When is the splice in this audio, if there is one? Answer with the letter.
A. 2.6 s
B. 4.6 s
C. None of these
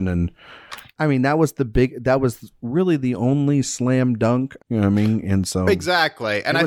B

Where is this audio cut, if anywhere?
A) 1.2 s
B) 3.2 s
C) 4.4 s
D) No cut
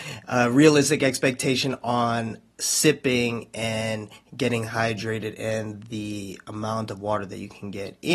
D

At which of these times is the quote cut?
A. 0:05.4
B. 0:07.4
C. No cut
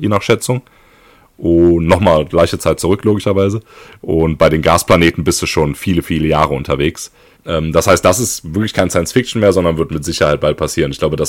B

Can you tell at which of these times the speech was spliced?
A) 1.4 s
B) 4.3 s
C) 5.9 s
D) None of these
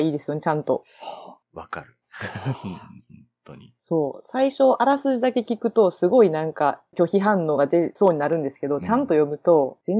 A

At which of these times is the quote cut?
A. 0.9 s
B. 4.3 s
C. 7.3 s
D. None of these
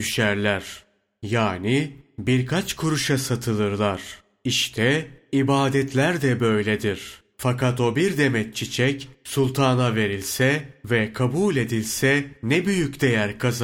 C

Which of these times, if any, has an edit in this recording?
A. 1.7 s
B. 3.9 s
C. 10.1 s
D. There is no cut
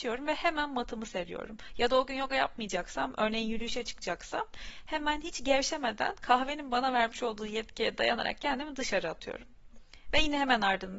D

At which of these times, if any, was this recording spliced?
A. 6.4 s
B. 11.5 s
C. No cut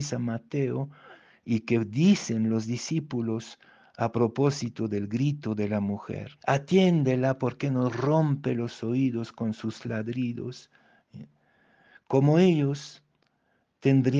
A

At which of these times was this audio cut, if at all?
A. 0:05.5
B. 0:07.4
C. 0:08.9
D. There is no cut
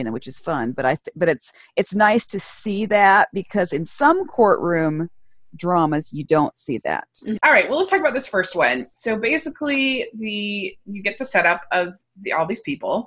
B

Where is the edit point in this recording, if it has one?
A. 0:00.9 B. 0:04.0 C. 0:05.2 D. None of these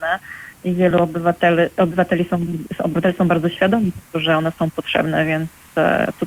D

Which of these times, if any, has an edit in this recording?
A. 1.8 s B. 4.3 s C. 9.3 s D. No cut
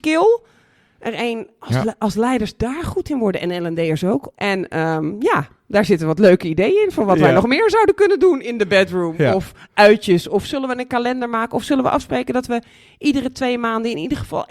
B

